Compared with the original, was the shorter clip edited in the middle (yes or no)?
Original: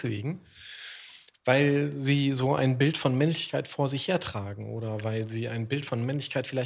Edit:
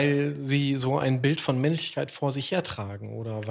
no